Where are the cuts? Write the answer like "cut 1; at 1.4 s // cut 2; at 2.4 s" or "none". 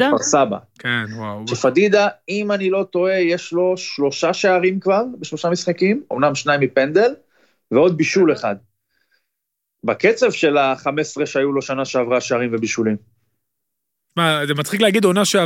none